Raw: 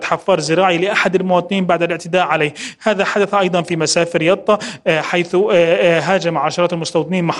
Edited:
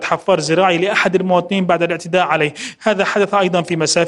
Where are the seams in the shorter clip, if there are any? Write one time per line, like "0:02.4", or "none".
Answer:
none